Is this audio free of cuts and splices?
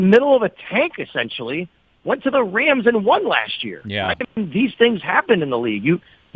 yes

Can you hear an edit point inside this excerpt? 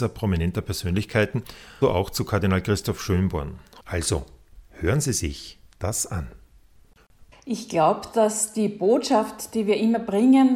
yes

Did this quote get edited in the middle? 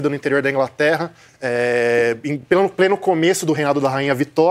no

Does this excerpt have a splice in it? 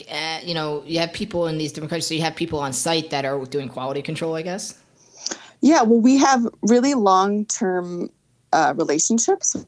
no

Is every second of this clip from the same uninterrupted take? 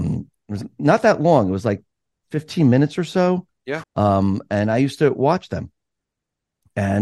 no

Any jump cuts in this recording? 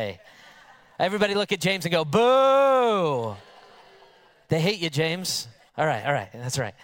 yes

